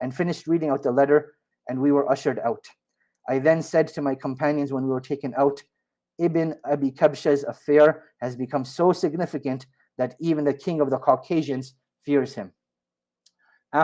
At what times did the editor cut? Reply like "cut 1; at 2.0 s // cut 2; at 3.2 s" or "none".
cut 1; at 1.5 s